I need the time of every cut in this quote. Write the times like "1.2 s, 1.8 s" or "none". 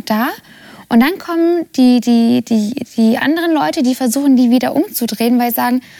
none